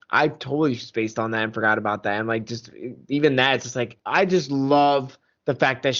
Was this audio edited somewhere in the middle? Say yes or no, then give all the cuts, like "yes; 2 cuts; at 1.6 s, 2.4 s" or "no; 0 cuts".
no; 0 cuts